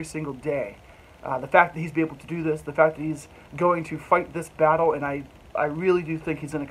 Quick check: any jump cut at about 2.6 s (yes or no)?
no